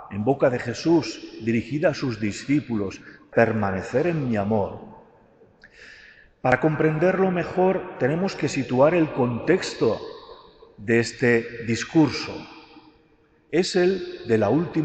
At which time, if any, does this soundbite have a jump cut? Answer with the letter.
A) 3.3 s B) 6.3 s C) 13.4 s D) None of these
A